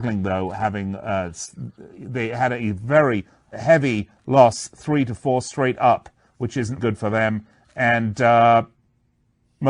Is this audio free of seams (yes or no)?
no